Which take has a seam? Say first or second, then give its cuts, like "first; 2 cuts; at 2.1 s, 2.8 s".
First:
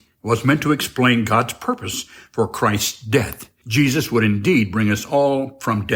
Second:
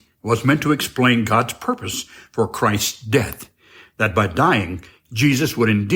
first; 1 cut; at 3.6 s